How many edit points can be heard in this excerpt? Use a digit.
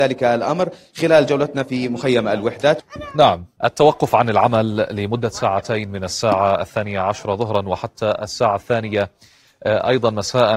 0